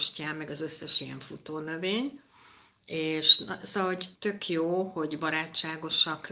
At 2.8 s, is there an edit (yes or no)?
no